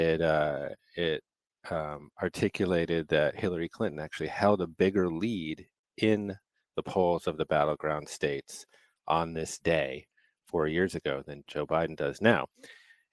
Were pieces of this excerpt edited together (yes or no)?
no